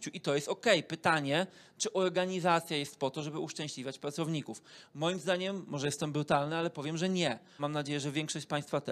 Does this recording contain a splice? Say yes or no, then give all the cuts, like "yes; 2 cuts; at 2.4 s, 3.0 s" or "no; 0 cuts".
yes; 1 cut; at 7.6 s